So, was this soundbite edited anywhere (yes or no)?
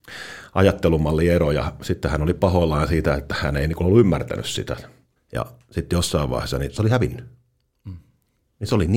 yes